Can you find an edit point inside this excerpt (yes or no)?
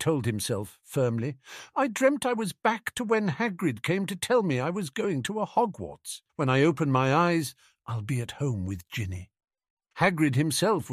yes